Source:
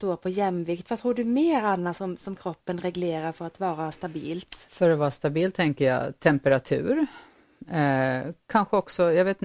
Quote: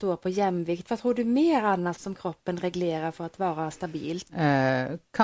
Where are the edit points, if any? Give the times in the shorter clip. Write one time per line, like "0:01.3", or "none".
0:02.0
0:04.3